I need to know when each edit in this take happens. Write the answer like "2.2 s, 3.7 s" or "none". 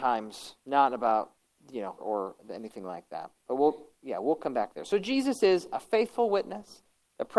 2.0 s, 3.9 s